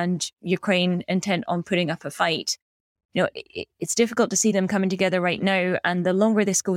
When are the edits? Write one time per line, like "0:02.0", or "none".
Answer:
none